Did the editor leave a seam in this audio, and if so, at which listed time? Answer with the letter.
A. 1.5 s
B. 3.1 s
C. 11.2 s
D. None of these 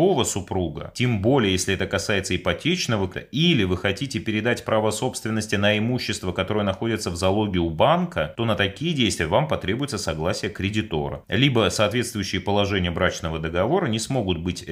B